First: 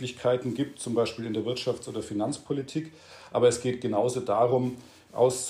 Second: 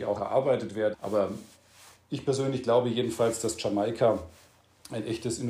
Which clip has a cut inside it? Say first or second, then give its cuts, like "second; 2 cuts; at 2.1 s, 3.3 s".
second; 1 cut; at 0.9 s